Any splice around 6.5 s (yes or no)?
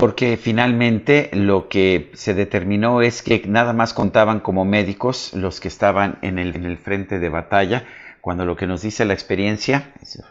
yes